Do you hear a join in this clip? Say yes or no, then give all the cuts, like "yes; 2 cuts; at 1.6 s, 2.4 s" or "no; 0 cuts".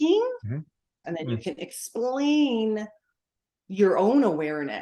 yes; 1 cut; at 1.0 s